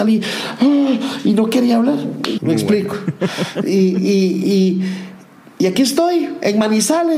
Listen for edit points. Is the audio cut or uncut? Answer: cut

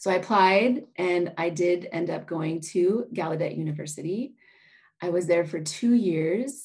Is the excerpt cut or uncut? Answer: uncut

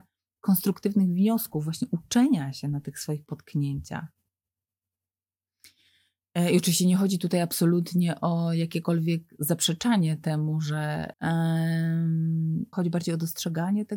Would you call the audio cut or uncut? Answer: cut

